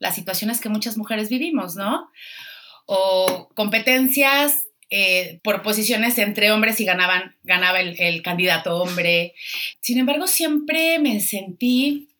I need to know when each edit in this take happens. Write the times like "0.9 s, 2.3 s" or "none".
5.4 s, 9.7 s